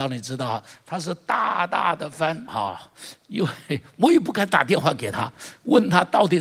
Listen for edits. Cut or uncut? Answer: cut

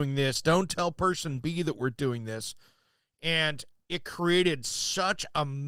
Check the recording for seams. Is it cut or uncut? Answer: uncut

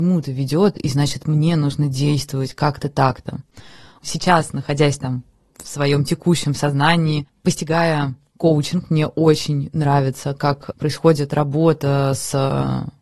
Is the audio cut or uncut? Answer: uncut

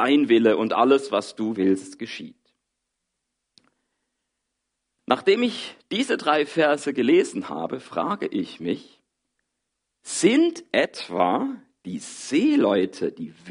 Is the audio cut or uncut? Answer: uncut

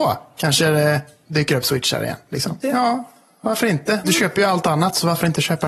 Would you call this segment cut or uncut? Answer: cut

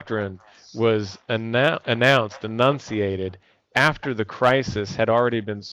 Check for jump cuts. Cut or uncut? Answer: uncut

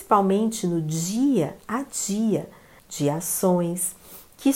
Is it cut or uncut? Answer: cut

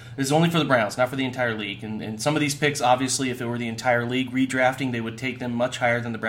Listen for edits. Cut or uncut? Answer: uncut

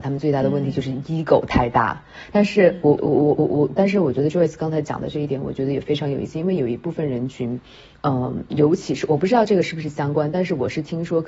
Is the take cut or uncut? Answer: cut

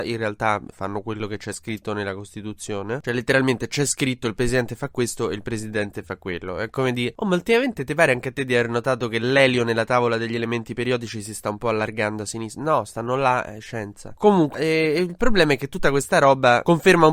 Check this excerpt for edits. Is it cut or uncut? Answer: cut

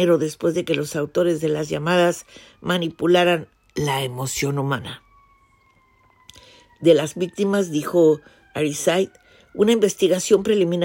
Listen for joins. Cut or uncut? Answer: uncut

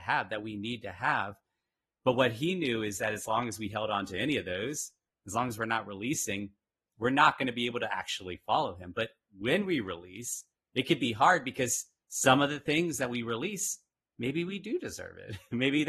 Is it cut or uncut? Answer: uncut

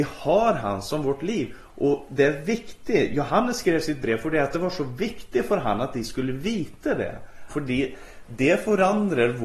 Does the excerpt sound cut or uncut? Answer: cut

